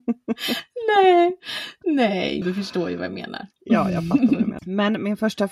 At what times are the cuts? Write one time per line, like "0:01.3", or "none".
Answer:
0:02.4
0:04.6